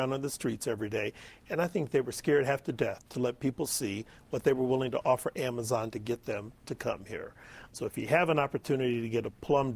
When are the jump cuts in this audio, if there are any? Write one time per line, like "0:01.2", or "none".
0:07.7